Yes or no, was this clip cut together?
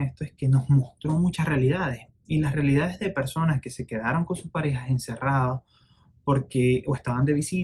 no